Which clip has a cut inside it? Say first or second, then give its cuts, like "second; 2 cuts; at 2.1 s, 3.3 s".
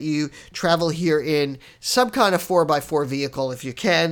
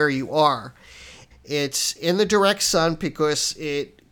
second; 1 cut; at 1.3 s